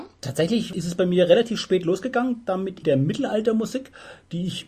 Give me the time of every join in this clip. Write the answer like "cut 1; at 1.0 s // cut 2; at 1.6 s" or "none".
cut 1; at 2.8 s